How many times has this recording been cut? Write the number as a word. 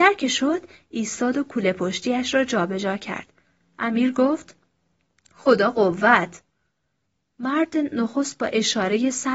zero